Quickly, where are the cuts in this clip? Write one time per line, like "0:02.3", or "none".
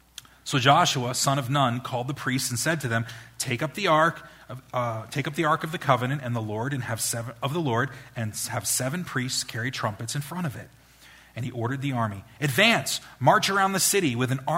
none